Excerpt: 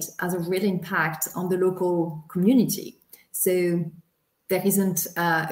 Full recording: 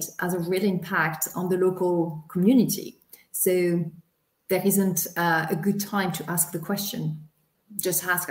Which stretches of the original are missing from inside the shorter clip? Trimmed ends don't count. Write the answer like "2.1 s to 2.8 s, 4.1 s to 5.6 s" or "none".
none